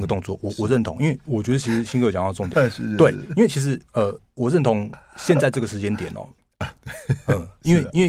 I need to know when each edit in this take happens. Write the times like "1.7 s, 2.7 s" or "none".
1.2 s, 2.5 s, 6.4 s